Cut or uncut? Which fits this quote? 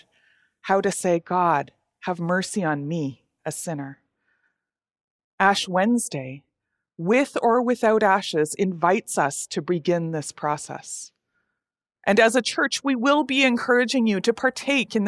cut